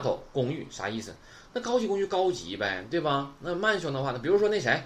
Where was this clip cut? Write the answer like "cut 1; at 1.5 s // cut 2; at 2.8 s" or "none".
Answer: none